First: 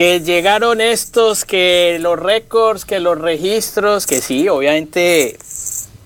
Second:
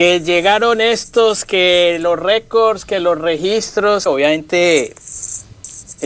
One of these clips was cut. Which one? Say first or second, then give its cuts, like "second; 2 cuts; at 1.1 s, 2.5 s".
second; 1 cut; at 4.1 s